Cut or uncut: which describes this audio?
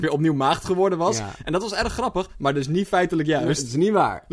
uncut